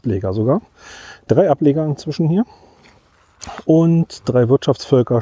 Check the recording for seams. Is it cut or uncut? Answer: uncut